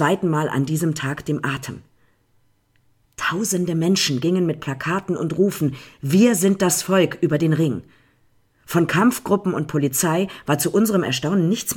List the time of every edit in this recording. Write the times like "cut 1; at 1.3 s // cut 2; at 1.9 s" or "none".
none